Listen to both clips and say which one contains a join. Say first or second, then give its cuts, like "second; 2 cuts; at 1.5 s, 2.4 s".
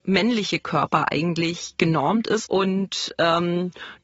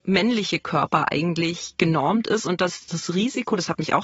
first; 1 cut; at 2.4 s